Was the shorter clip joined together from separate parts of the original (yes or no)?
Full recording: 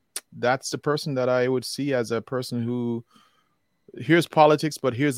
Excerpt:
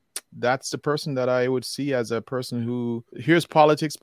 yes